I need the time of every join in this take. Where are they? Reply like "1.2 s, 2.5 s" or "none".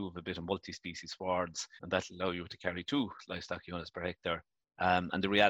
1.8 s

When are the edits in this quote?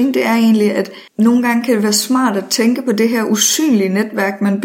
1.1 s

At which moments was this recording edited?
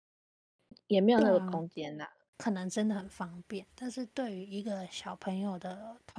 2.3 s

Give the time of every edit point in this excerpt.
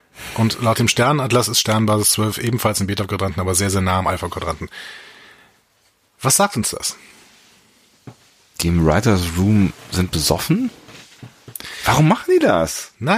none

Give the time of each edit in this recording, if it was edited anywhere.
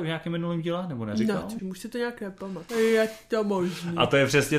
1.6 s, 2.7 s

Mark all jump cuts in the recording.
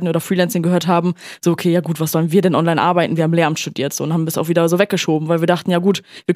none

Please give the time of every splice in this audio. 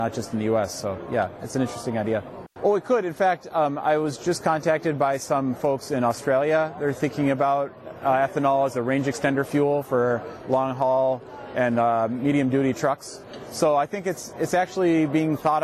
2.6 s

